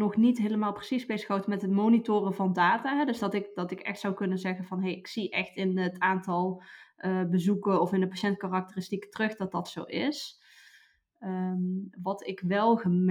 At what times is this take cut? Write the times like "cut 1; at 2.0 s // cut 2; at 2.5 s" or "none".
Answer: none